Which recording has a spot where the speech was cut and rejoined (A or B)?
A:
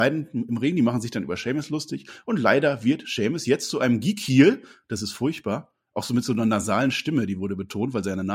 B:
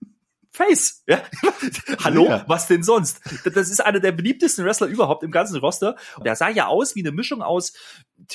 B